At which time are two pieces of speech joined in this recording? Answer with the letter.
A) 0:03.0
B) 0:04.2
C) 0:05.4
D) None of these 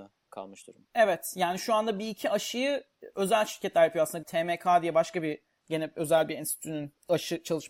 B